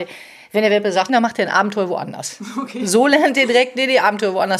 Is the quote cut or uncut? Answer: cut